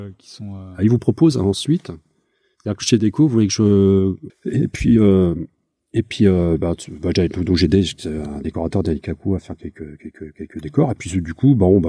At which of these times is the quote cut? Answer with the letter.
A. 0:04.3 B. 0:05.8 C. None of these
A